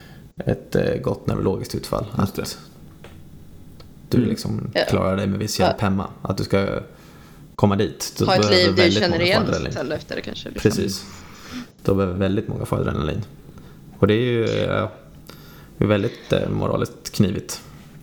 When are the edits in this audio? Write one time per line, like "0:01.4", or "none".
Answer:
none